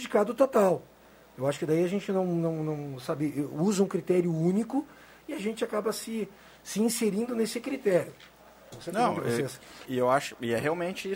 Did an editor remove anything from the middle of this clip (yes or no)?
yes